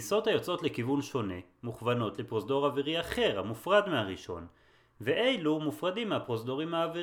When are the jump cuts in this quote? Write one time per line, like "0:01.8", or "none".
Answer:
none